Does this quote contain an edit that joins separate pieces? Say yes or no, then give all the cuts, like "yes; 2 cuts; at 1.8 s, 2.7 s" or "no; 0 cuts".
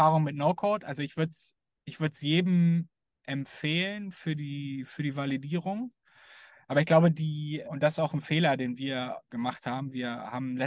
yes; 2 cuts; at 7.6 s, 9.3 s